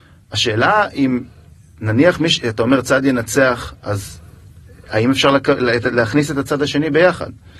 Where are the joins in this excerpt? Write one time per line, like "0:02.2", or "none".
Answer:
none